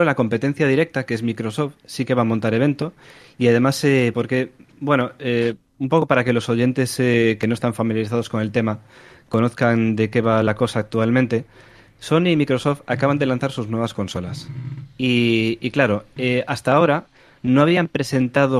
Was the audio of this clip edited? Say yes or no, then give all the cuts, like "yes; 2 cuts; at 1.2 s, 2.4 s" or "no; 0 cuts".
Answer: yes; 1 cut; at 4.1 s